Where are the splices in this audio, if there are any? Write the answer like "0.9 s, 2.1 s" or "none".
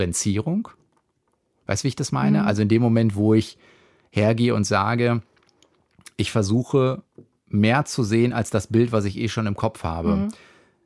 none